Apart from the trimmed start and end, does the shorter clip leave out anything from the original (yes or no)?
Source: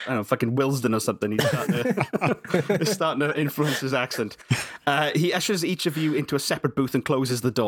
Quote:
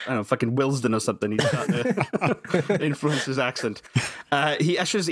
yes